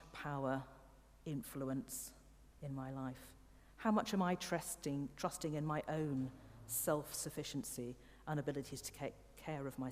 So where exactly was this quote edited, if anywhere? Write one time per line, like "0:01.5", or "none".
none